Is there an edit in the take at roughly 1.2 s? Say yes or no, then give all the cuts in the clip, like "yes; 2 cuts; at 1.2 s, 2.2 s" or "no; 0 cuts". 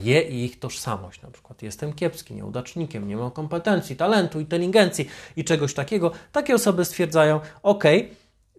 no; 0 cuts